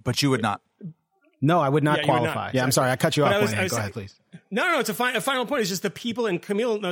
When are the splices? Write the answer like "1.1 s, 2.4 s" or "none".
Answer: 2.5 s